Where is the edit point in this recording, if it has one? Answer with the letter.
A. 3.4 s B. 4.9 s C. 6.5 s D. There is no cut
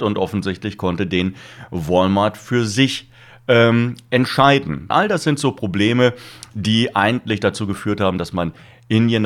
B